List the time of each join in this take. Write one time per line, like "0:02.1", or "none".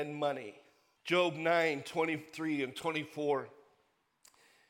0:01.0